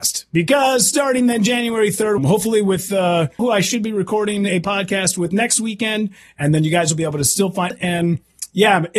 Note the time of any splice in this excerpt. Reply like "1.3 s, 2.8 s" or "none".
2.2 s, 3.4 s, 7.7 s